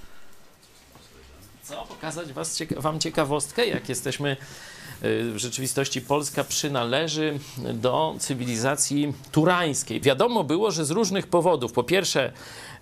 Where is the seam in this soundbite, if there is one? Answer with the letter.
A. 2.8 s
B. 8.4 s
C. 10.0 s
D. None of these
C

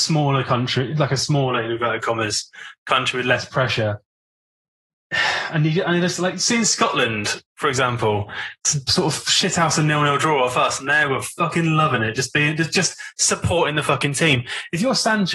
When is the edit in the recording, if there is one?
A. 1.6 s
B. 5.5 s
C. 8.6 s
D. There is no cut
D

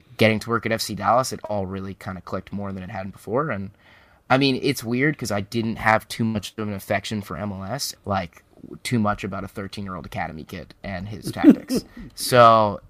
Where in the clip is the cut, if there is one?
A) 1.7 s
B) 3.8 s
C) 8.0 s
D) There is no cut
C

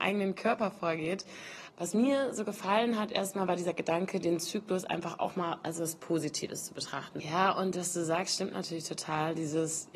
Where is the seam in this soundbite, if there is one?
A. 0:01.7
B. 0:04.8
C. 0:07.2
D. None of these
C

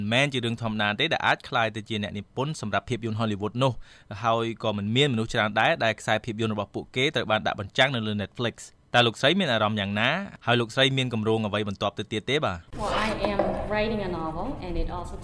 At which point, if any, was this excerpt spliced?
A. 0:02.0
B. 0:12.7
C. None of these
B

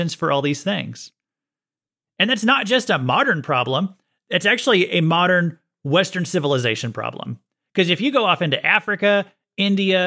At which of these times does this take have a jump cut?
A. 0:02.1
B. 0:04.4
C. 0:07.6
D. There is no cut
D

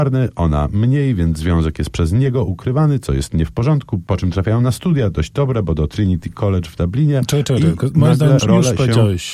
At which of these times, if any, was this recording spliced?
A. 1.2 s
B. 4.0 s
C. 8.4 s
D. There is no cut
C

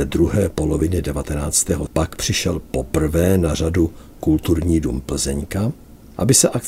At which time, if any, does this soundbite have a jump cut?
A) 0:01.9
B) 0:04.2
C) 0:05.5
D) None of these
A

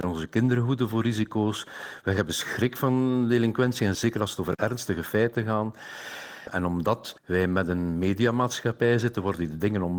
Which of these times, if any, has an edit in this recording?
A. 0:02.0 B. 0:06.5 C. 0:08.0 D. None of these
D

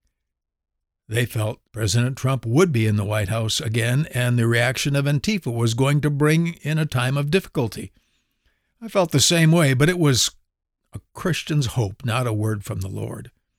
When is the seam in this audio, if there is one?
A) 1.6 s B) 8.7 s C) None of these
A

